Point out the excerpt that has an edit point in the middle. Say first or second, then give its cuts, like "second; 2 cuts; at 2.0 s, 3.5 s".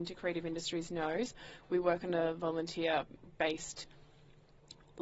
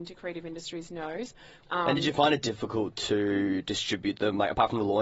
second; 1 cut; at 1.6 s